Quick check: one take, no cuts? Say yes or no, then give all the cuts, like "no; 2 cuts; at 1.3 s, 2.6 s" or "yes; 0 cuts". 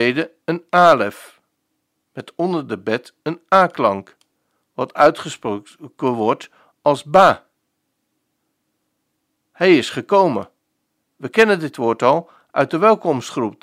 yes; 0 cuts